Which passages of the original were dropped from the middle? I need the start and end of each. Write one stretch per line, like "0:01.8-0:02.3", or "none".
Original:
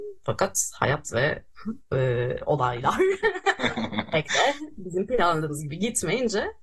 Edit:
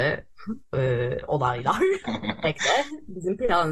0:03.2-0:03.7